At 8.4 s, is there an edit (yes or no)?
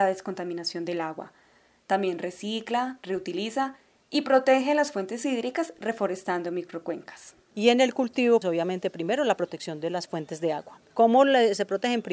yes